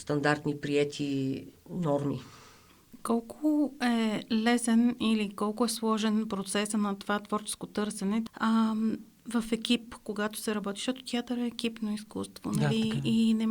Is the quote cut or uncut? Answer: cut